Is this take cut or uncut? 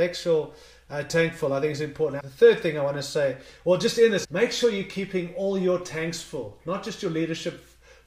cut